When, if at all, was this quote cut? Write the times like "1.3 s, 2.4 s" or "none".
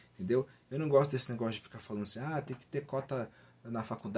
none